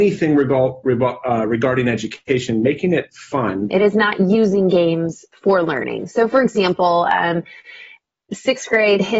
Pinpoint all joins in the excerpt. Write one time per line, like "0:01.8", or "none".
0:03.7